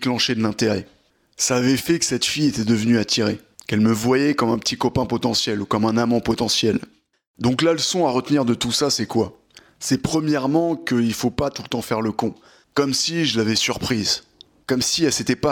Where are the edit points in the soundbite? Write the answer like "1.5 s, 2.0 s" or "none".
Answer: 3.6 s, 12.6 s